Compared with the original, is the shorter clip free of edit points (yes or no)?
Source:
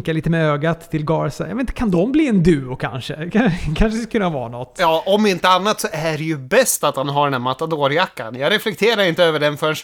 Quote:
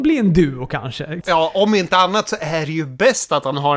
no